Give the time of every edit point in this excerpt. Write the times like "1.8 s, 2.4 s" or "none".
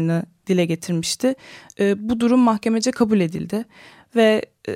none